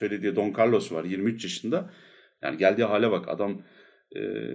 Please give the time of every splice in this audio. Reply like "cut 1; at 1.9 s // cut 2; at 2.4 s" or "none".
cut 1; at 2.4 s

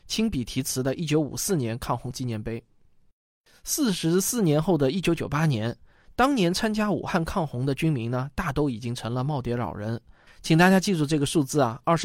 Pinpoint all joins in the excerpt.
cut 1; at 10.3 s

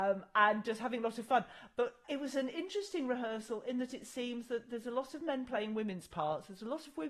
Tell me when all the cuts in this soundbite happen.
cut 1; at 2.0 s

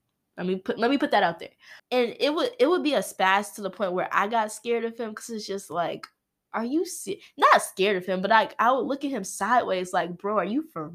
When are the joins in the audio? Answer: cut 1; at 1.8 s

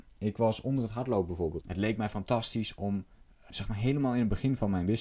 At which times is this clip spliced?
cut 1; at 1.6 s // cut 2; at 3.5 s

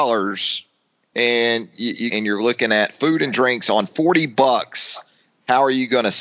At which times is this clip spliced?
cut 1; at 2.1 s

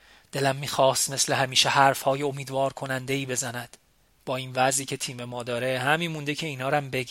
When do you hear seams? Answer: none

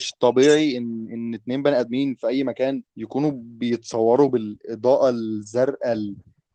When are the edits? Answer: cut 1; at 2.9 s

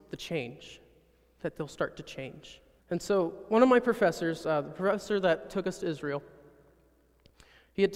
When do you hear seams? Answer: cut 1; at 2.8 s

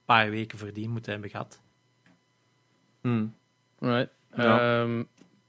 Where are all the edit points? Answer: none

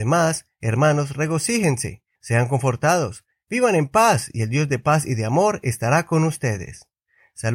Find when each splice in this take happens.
cut 1; at 2.1 s // cut 2; at 3.3 s

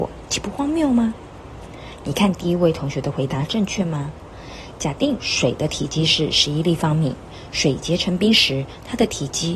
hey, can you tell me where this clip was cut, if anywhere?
none

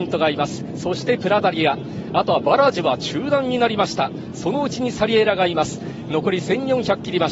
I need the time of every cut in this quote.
none

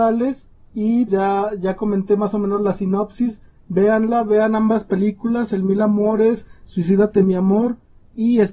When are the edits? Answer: cut 1; at 1.1 s

